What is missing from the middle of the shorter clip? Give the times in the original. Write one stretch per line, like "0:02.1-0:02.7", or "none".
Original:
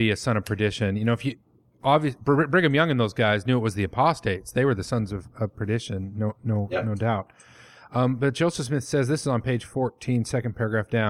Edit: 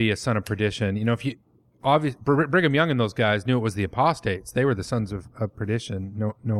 none